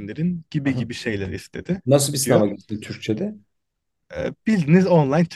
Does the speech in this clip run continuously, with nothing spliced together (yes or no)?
no